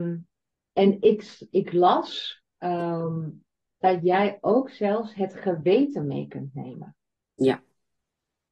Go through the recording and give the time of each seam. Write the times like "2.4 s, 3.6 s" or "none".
1.5 s, 3.7 s